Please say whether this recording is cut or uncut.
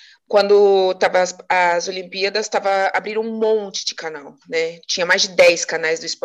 uncut